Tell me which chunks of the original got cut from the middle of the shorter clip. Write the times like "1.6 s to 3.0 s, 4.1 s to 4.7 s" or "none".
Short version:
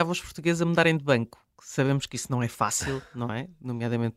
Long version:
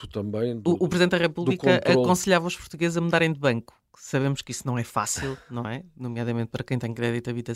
none